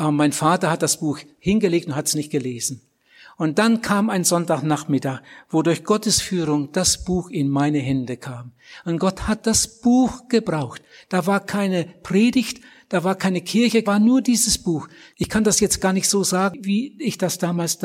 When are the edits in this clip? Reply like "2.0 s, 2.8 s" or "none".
13.8 s, 15.1 s